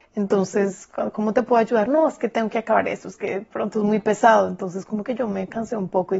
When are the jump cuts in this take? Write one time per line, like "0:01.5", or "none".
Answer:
none